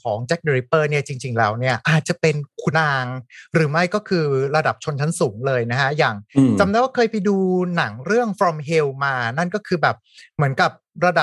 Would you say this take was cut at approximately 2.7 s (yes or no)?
yes